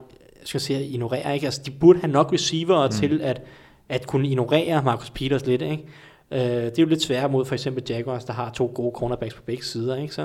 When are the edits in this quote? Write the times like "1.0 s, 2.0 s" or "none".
none